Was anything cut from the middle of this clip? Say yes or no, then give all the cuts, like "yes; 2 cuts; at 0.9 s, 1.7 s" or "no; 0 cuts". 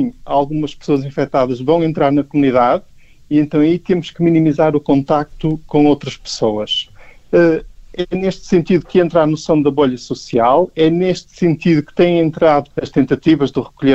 yes; 2 cuts; at 7.2 s, 12.7 s